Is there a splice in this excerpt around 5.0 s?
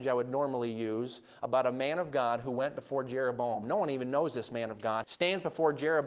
yes; 1 cut; at 5.0 s

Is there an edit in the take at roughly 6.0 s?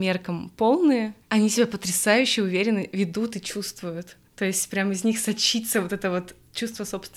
no; 1 cut; at 1.2 s

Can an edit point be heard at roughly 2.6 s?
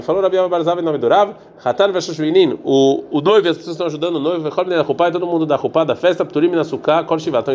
no; 0 cuts

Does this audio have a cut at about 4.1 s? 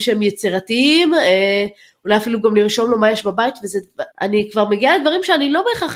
yes; 1 cut; at 4.1 s

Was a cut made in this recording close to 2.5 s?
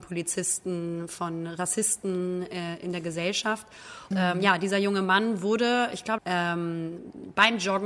no; 3 cuts; at 1.1 s, 4.1 s, 6.2 s

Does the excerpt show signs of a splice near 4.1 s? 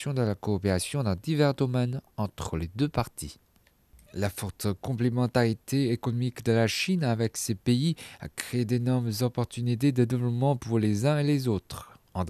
yes; 1 cut; at 4.1 s

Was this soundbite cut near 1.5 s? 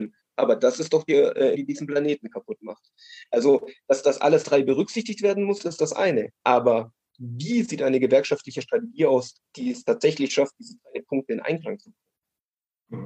yes; 1 cut; at 1.5 s

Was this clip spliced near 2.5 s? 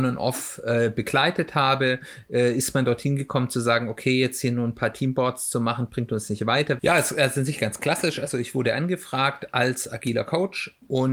no; 1 cut; at 6.8 s

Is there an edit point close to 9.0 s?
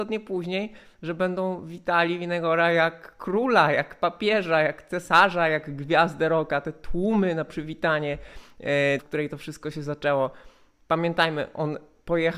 yes; 1 cut; at 9.0 s

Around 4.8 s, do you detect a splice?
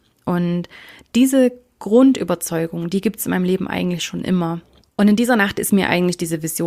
yes; 1 cut; at 4.8 s

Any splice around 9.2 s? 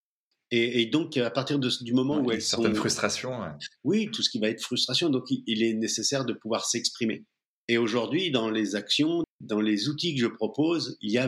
yes; 1 cut; at 9.2 s

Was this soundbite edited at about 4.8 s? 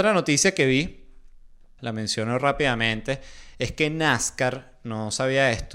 no; 1 cut; at 1.8 s

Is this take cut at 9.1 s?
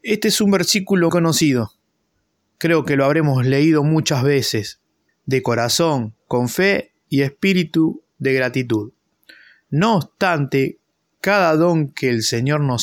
no; 2 cuts; at 1.1 s, 5.1 s

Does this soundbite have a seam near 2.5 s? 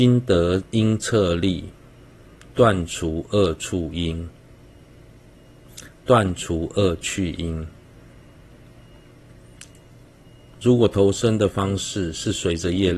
no; 0 cuts

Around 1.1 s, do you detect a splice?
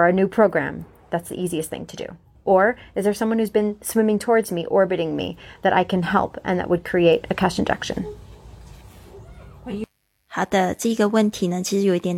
no; 1 cut; at 2.4 s

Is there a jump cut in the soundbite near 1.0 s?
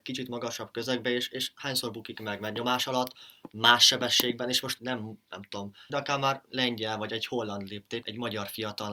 no; 3 cuts; at 4.8 s, 5.9 s, 8.0 s

